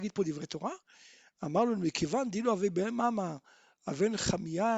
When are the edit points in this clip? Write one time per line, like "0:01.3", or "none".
none